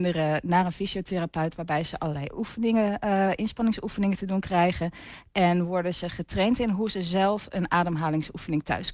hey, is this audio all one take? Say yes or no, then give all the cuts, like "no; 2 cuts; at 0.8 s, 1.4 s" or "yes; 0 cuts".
yes; 0 cuts